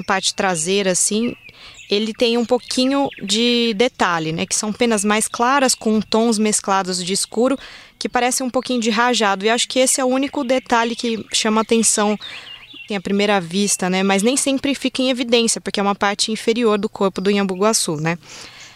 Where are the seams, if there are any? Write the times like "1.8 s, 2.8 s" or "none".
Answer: 12.9 s